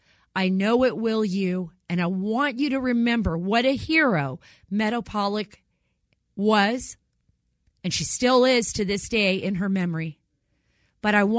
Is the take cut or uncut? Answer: uncut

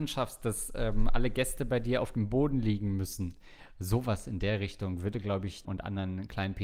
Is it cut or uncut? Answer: cut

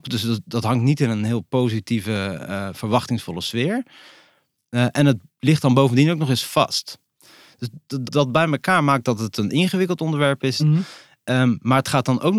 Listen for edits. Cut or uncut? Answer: cut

